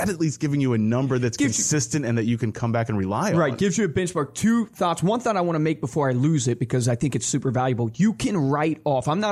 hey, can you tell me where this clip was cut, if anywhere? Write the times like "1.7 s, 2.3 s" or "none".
none